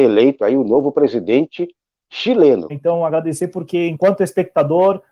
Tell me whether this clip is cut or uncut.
cut